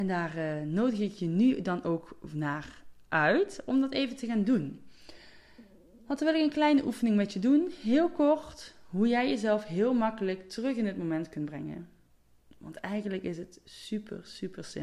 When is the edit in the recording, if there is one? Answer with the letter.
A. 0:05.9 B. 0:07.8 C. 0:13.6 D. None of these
D